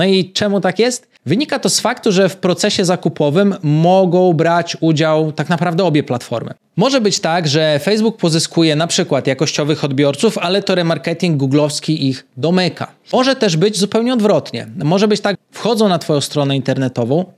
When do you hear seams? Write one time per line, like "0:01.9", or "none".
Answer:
0:15.3